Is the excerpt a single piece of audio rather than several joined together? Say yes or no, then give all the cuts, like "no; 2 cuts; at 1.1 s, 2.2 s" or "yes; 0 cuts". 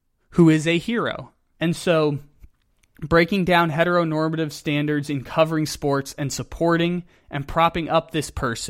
no; 1 cut; at 1.5 s